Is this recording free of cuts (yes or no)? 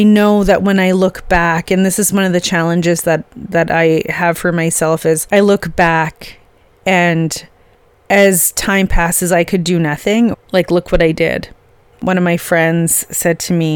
no